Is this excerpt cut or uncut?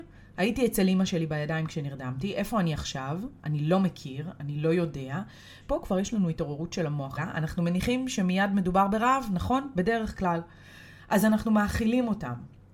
cut